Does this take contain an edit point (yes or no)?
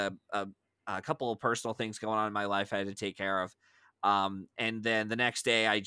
no